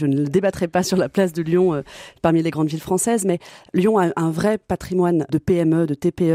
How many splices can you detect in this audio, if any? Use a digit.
0